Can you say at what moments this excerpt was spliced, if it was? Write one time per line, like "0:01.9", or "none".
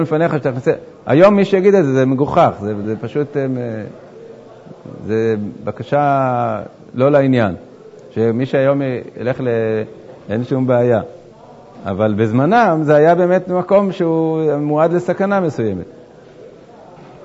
0:02.8
0:10.2